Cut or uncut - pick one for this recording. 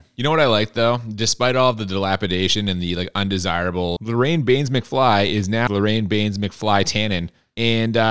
cut